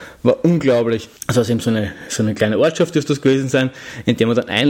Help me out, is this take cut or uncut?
cut